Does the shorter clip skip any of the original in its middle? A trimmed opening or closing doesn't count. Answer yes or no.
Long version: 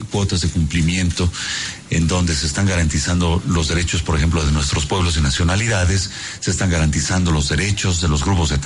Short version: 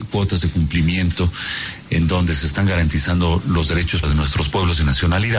yes